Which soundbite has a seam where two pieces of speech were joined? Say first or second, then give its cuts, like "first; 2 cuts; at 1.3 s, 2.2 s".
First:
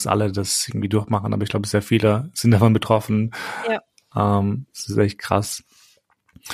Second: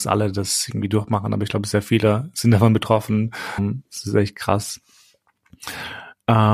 second; 1 cut; at 3.6 s